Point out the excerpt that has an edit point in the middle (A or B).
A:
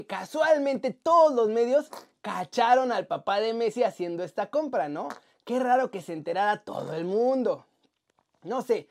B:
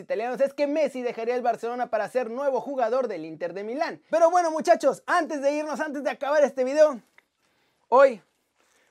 B